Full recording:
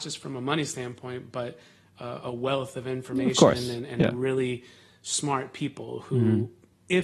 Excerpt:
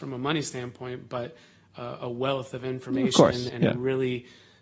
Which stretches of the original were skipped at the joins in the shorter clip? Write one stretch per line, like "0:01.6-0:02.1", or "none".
0:03.7-0:03.9